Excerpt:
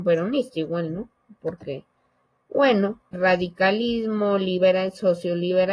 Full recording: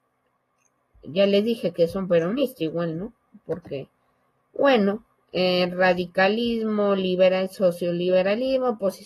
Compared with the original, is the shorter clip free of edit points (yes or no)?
no